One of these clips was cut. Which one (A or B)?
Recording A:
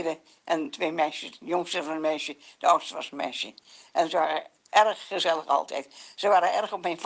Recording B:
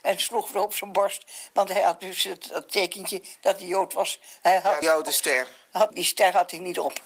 B